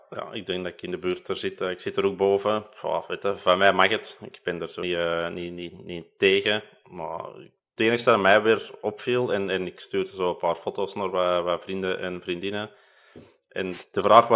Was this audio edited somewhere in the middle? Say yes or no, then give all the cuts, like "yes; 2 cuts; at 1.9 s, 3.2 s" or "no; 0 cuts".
yes; 1 cut; at 4.8 s